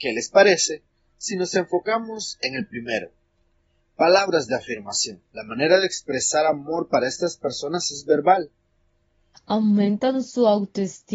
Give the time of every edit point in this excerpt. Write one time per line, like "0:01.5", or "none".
0:05.3
0:09.3